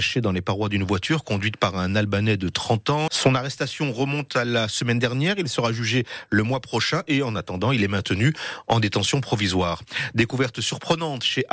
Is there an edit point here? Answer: yes; 1 cut; at 3.1 s

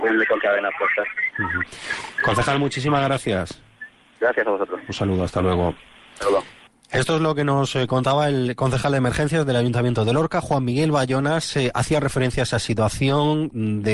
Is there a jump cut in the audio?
no; 0 cuts

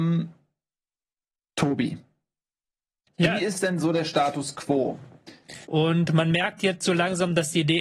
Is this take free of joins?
no; 1 cut; at 5.6 s

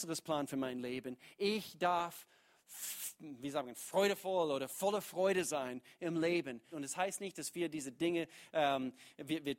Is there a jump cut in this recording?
yes; 1 cut; at 6.7 s

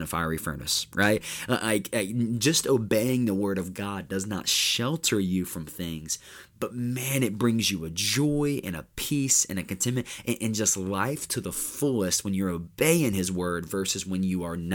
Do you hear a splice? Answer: no; 0 cuts

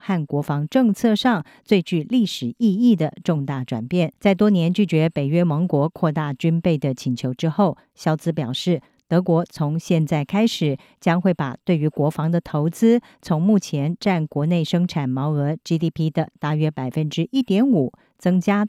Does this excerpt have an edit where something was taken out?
yes; 1 cut; at 4.2 s

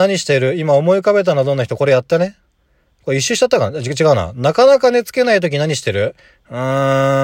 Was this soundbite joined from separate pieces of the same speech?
no; 0 cuts

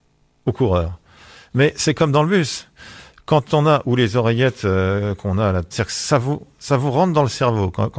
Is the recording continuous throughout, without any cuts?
no; 2 cuts; at 3.8 s, 5.7 s

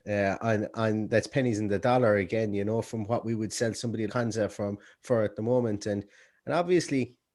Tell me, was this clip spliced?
yes; 1 cut; at 4.1 s

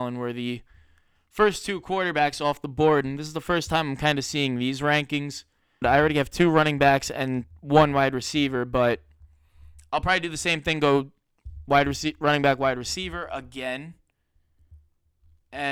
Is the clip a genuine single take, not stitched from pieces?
no; 1 cut; at 5.8 s

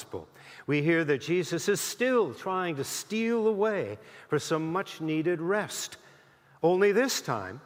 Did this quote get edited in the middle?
no; 0 cuts

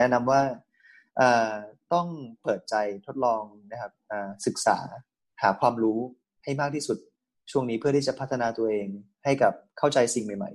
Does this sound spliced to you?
no; 0 cuts

